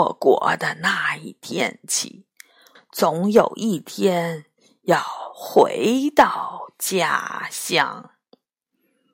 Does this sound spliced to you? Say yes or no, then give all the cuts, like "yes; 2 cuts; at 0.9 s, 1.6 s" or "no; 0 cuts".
yes; 1 cut; at 2.8 s